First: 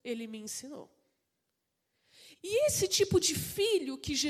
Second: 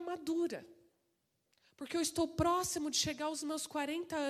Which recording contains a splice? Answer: first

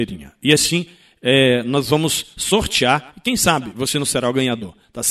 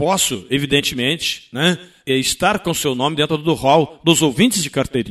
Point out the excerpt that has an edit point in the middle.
second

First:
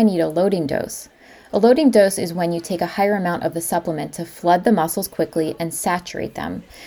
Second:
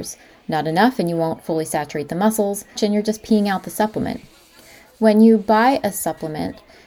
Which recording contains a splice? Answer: second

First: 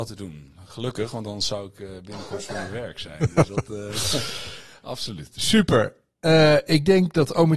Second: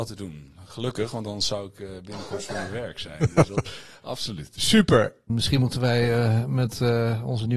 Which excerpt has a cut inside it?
second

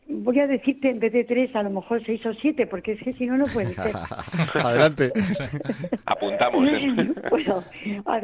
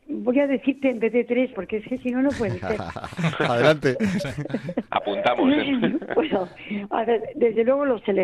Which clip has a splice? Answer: second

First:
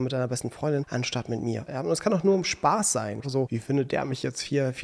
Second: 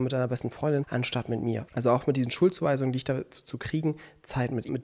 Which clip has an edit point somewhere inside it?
first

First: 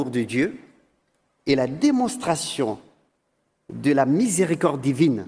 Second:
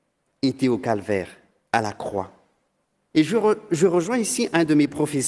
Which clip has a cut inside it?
second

